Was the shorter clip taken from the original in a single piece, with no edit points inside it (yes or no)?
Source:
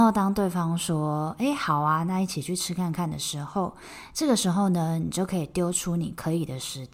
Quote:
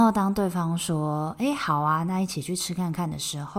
yes